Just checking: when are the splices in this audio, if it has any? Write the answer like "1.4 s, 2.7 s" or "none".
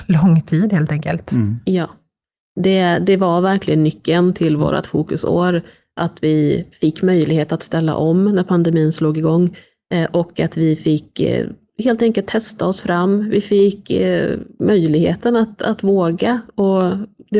none